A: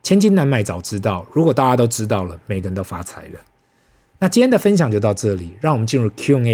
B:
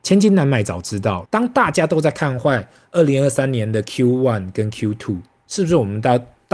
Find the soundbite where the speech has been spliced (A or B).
B